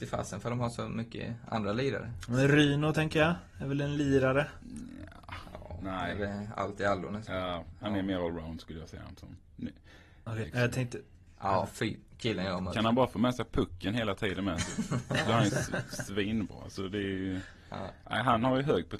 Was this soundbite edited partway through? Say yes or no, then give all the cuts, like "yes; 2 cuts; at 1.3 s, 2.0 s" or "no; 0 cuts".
yes; 2 cuts; at 10.4 s, 12.1 s